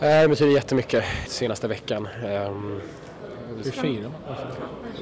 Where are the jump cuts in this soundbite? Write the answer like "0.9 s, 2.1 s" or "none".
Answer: 1.3 s, 3.6 s